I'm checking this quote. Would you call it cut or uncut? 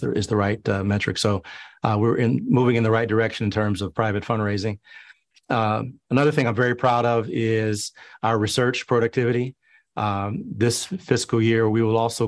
uncut